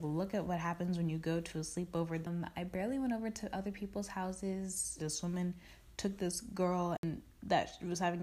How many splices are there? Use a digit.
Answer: 2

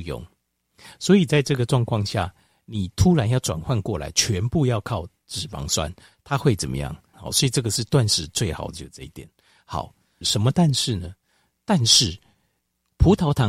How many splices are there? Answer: 2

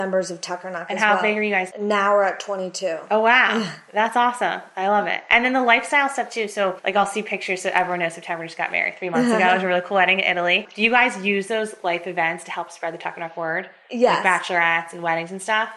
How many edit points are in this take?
1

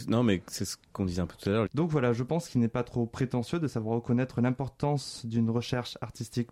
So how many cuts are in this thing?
1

